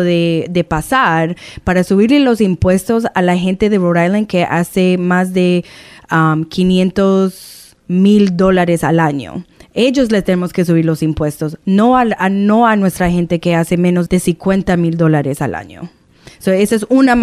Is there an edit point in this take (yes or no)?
yes